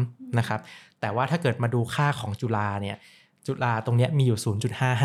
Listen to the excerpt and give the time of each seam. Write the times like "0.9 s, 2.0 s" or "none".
none